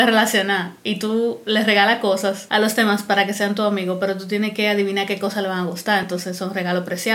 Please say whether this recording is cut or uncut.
uncut